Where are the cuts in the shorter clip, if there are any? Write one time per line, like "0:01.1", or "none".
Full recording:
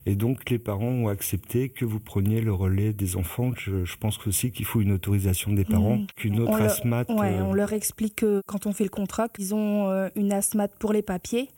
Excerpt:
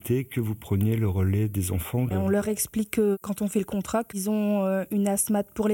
0:02.1